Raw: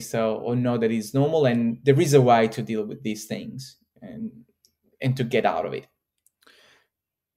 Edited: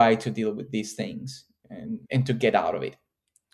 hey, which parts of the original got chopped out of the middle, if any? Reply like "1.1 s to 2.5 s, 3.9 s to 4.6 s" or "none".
4.4 s to 4.9 s

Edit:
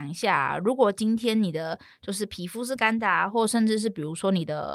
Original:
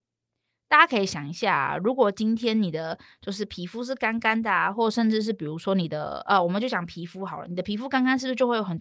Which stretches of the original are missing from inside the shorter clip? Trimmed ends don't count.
3.9 s to 4.2 s

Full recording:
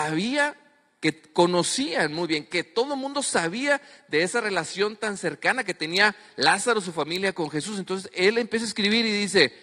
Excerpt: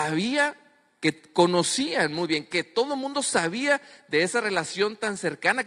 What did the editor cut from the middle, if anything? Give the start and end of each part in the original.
none

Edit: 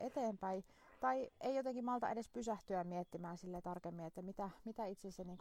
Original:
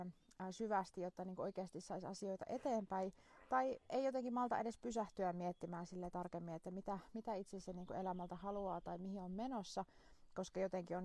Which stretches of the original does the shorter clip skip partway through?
none

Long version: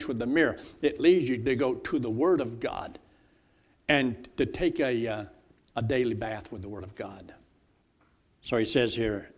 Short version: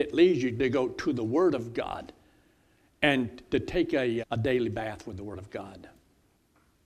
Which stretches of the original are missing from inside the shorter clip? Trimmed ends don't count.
5.1 s to 5.7 s

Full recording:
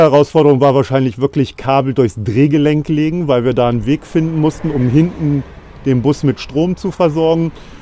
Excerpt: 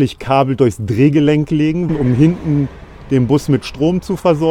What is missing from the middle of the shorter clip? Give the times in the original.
3.3 s to 4.6 s

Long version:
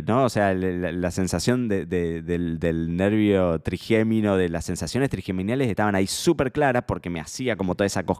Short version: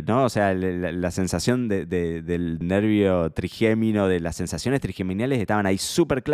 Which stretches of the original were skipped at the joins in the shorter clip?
2.6 s to 2.9 s

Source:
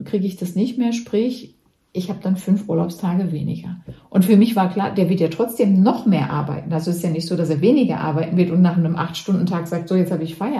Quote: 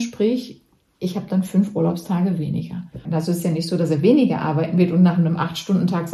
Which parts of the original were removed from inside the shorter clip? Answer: 4.0 s to 6.6 s

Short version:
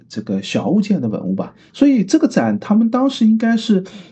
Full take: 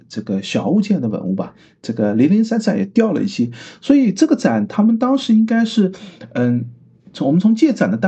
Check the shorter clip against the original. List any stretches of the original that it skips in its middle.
1.7 s to 3.8 s

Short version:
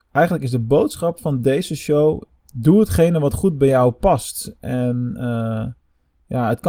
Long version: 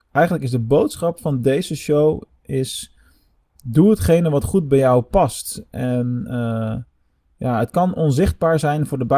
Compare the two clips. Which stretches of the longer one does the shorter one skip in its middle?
2.4 s to 3.5 s

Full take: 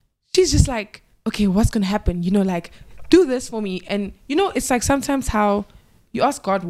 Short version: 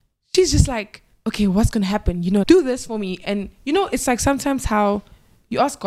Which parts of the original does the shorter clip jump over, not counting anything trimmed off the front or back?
2.4 s to 3.1 s

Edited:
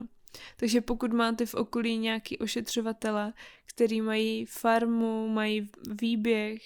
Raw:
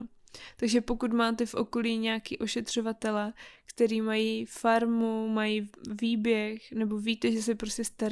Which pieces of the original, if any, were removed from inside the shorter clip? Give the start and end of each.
none

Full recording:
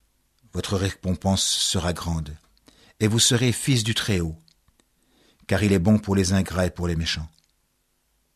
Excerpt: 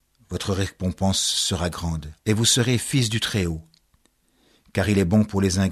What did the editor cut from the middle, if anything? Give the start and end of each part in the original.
2.4 s to 2.9 s

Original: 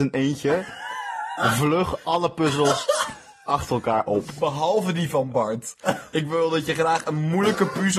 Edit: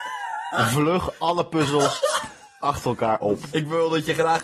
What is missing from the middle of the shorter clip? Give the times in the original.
4.4 s to 6.1 s

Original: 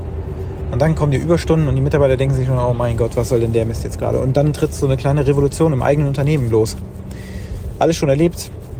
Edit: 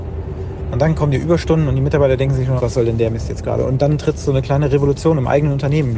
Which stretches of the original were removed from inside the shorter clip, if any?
2.6 s to 3.1 s

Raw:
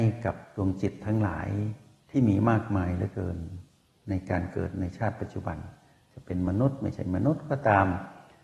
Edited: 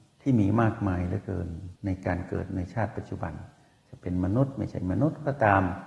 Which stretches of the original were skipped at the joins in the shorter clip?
3.6 s to 4.0 s

